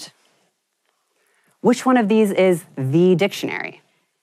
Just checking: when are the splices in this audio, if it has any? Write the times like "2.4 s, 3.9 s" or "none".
none